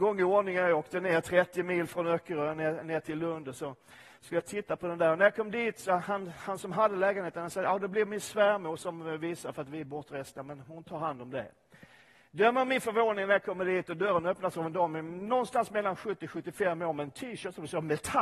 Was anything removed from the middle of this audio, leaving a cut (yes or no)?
yes